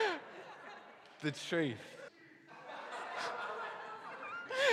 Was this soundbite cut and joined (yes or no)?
yes